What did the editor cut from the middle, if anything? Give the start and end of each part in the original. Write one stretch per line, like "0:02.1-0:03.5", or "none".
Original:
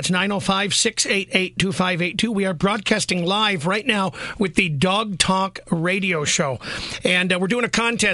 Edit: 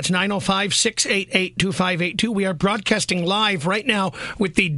none